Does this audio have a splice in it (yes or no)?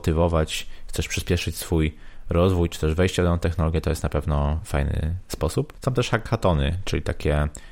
no